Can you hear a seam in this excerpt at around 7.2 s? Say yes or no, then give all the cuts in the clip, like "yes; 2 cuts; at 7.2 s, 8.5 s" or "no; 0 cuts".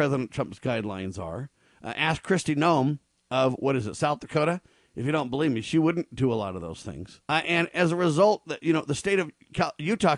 yes; 1 cut; at 7.2 s